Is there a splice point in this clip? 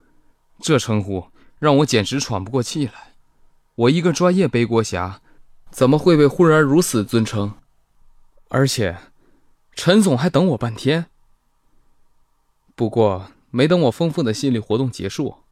no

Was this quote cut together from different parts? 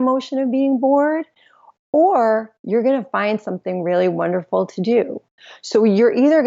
no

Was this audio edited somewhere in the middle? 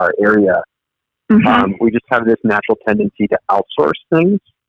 no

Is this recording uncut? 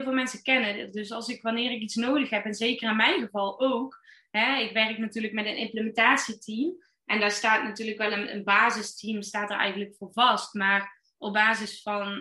yes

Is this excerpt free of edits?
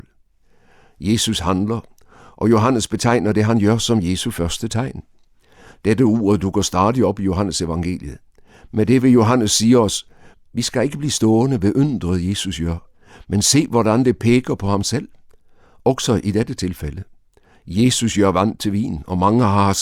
yes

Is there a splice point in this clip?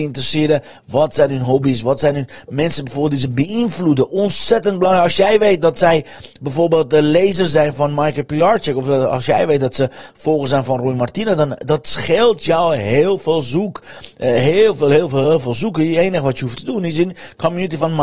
yes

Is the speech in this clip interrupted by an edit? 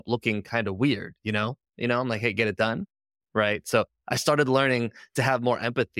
yes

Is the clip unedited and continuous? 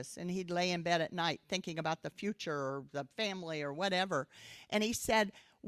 yes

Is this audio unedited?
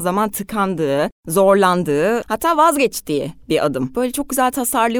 yes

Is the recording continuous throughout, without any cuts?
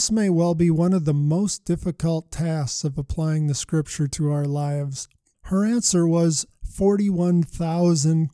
no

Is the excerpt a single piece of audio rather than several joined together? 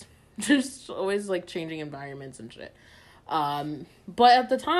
yes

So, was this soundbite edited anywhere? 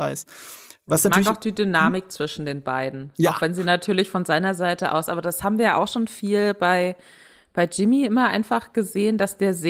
no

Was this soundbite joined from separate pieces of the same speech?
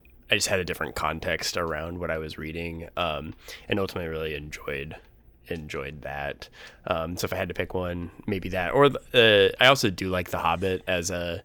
no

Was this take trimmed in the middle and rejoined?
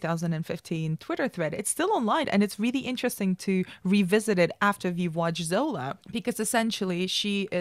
yes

